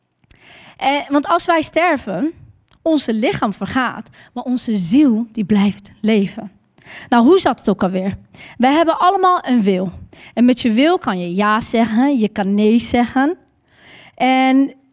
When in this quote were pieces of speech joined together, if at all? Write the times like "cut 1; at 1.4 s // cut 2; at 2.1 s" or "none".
none